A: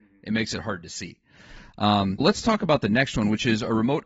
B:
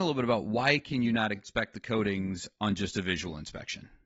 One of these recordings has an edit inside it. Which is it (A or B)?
A